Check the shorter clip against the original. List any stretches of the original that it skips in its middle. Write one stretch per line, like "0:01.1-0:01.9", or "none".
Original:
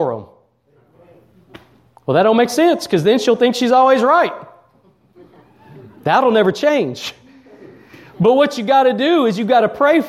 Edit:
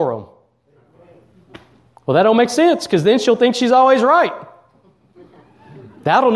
none